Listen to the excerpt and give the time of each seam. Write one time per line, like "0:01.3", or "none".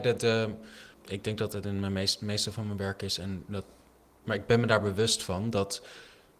0:04.2

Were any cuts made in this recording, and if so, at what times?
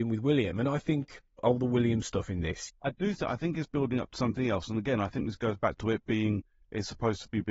0:01.4
0:02.7

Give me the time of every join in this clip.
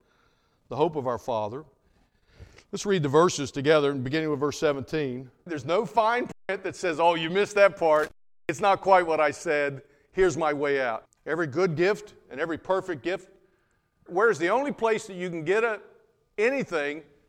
0:05.5
0:11.1
0:14.1

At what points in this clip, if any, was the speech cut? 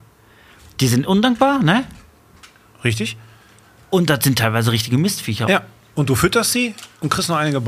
none

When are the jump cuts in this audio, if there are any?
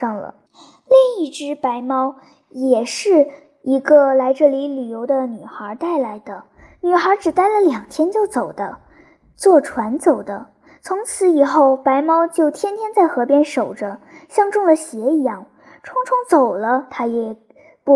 none

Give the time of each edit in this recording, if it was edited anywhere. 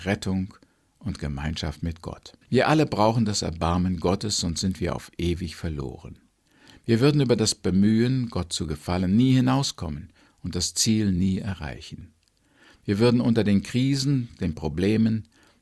0:02.4

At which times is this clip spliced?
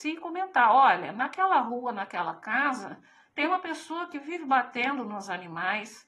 none

